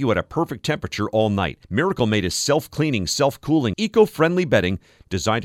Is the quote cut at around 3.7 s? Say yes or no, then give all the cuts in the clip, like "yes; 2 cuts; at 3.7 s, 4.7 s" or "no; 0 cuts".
yes; 2 cuts; at 1.6 s, 3.7 s